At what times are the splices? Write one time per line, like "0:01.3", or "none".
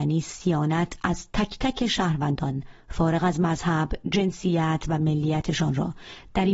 none